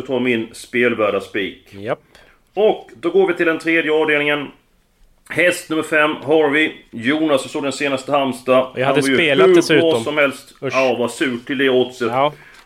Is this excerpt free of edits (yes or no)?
yes